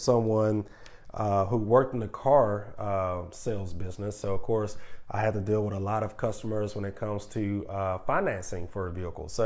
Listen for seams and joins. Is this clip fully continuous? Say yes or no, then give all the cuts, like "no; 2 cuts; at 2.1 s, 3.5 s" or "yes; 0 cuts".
yes; 0 cuts